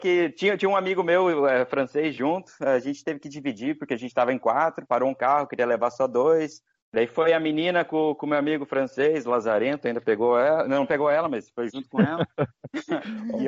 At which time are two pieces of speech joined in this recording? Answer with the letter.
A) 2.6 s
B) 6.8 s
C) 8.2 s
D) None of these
D